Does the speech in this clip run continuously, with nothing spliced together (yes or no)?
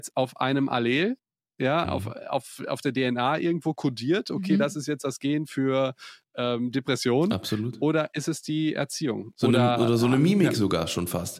no